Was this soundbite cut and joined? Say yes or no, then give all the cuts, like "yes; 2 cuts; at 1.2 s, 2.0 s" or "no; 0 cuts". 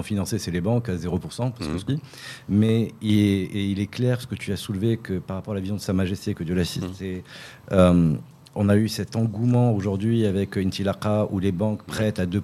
yes; 1 cut; at 1.9 s